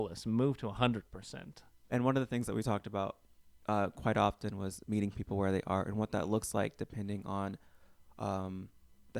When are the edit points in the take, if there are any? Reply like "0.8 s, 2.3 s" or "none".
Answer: 1.9 s